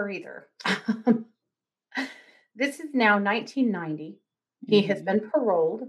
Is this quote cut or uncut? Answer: cut